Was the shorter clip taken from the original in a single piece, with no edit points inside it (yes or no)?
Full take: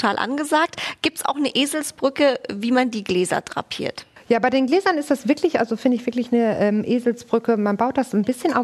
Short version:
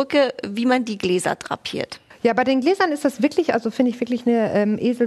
yes